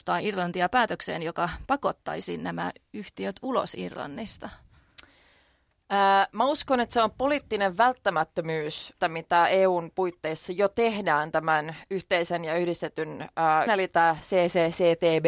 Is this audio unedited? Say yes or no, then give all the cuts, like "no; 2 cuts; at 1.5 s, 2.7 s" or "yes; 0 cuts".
no; 2 cuts; at 9.0 s, 13.7 s